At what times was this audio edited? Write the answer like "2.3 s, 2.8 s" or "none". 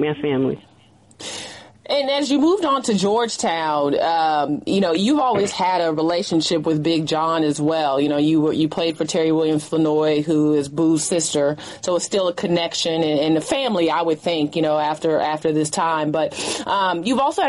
none